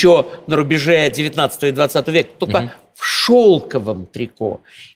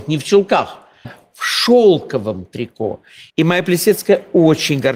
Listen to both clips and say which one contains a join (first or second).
second